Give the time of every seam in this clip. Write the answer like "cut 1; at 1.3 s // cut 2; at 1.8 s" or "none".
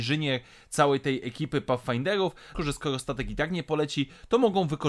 cut 1; at 2.5 s